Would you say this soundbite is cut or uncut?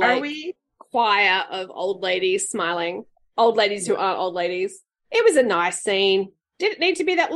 uncut